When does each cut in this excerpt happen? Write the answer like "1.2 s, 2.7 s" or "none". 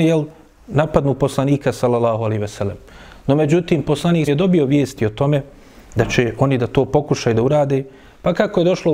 4.3 s